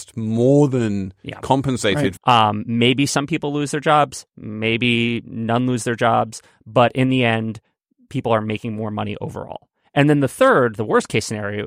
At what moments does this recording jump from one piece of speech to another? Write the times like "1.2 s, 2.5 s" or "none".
2.2 s

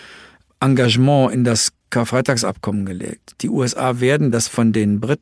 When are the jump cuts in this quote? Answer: none

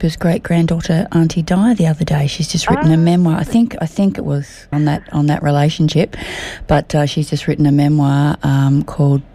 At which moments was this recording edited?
4.7 s

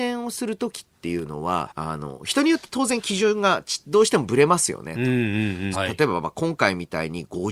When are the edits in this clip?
1.7 s, 5.7 s

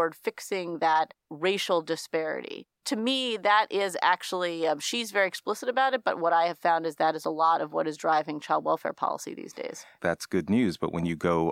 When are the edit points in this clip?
2.8 s, 10.0 s

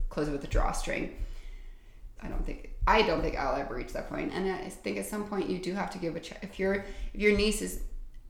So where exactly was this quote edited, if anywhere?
2.2 s

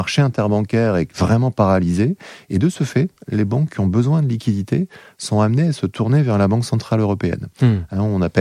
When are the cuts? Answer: none

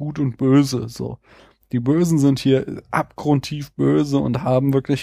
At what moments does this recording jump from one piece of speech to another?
none

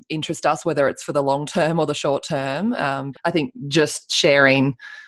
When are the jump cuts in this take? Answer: 3.1 s

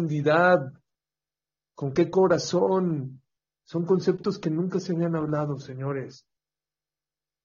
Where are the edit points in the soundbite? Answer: none

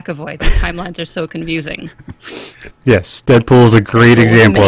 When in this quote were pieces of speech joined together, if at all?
2.7 s

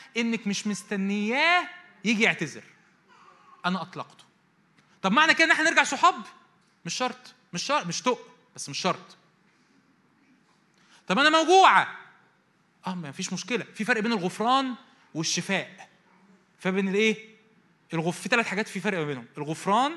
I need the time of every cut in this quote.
none

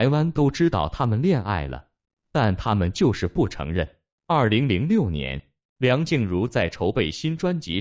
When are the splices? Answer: none

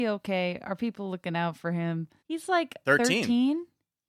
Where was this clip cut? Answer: 2.2 s

